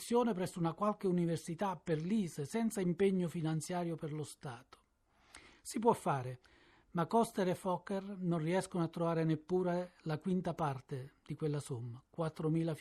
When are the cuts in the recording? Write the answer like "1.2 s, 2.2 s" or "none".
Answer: 5.5 s